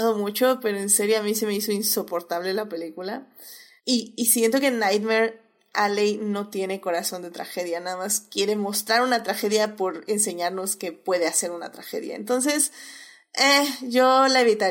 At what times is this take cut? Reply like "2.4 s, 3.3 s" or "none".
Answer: 3.8 s